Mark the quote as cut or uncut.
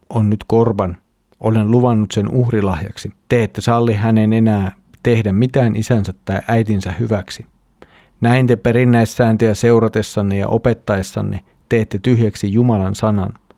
cut